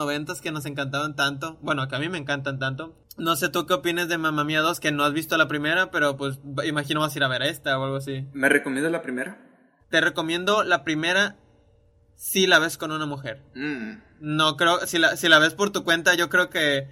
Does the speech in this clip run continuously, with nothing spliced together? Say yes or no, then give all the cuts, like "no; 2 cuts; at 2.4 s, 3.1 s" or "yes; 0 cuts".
yes; 0 cuts